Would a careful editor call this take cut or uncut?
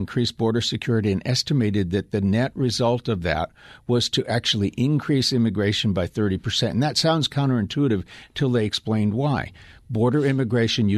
uncut